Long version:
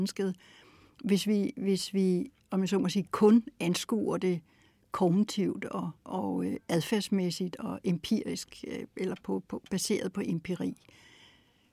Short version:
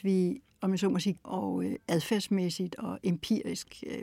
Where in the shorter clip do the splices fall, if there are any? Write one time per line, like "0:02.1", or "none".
0:01.2